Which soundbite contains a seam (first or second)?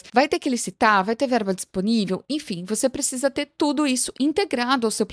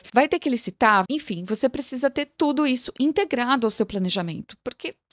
second